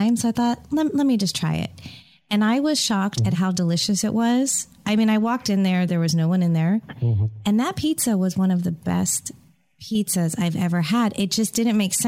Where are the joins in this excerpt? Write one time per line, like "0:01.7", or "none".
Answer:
none